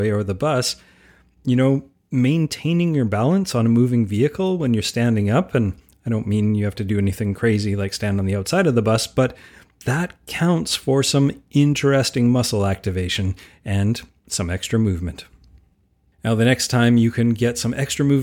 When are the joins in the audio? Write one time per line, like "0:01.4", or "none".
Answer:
none